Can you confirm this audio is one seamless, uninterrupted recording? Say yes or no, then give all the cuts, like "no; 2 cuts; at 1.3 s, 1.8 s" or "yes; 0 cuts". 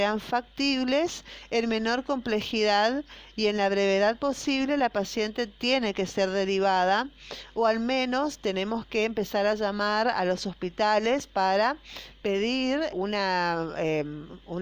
no; 1 cut; at 12.9 s